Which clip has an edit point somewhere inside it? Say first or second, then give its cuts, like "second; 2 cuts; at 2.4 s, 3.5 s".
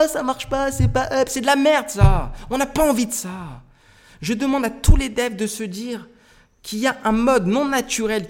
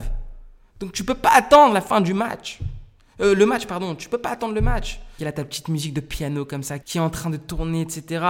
second; 2 cuts; at 5.2 s, 6.8 s